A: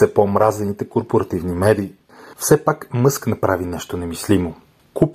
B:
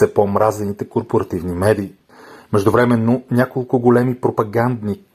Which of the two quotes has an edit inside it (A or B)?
A